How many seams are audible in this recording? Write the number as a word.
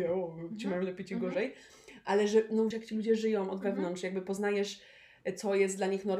one